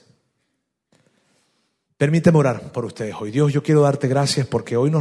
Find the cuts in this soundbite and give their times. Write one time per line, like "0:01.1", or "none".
none

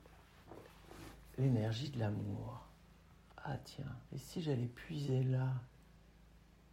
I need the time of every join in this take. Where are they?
0:04.1

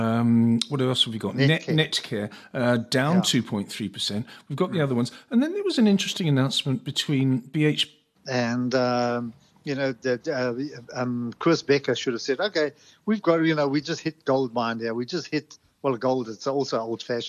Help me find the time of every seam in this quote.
0:08.1

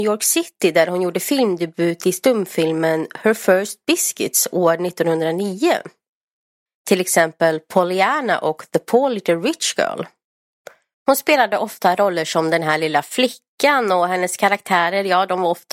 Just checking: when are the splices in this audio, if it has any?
0:06.7
0:10.9

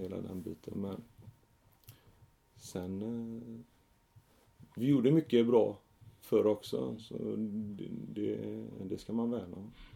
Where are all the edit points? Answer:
0:08.8

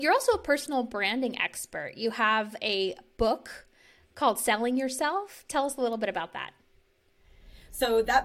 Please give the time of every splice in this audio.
none

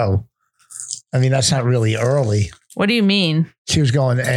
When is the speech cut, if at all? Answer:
none

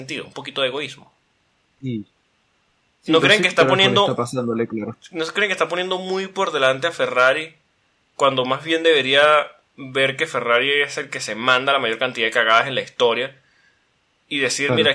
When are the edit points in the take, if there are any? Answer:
none

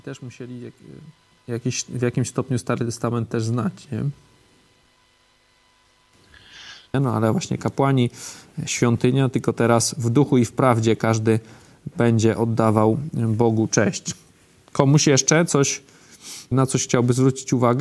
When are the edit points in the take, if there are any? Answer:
0:06.9
0:16.5

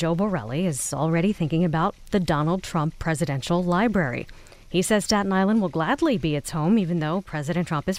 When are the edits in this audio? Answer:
none

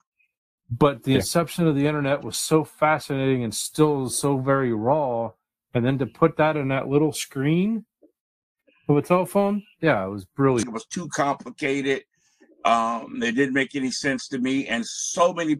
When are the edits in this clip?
0:10.6

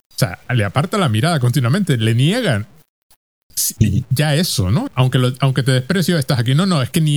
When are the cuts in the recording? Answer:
0:04.9

